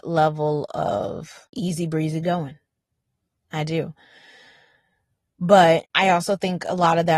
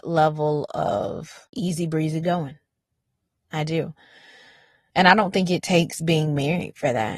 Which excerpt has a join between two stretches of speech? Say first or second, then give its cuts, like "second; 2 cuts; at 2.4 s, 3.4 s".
second; 1 cut; at 4.9 s